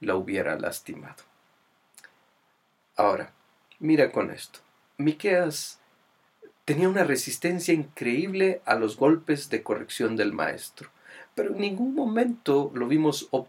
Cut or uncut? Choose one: uncut